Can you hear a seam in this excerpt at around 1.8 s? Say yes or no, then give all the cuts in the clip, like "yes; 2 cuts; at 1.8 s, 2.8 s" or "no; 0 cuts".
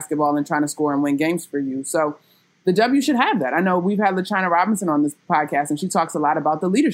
no; 0 cuts